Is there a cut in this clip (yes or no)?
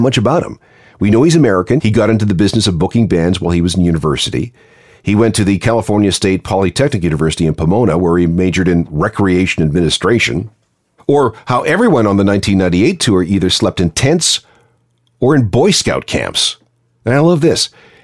yes